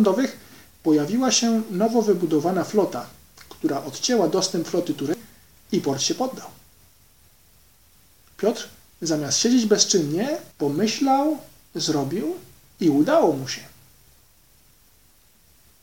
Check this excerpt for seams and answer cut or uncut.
cut